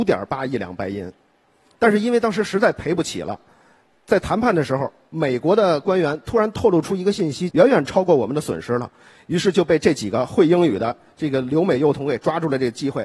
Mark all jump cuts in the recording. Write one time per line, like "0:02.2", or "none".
0:07.5